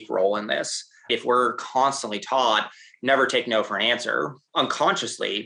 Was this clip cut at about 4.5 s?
yes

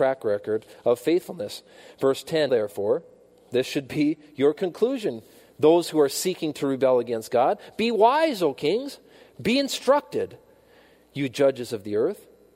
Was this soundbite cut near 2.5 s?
yes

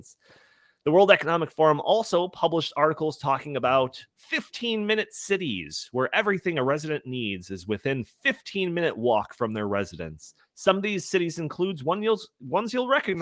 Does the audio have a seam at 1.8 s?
no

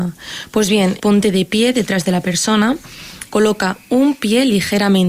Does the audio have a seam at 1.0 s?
yes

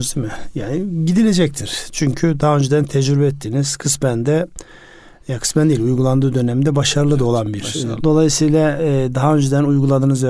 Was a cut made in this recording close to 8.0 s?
yes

